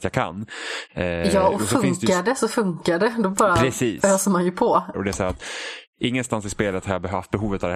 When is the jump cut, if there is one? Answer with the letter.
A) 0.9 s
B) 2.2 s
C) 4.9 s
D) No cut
C